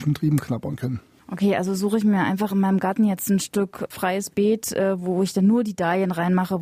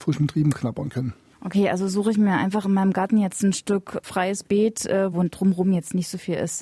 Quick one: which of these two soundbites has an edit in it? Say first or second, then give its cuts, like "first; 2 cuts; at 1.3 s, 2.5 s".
second; 1 cut; at 5.1 s